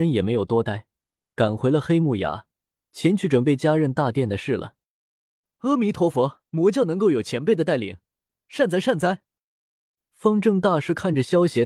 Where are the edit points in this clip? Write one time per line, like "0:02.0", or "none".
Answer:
0:06.5
0:08.4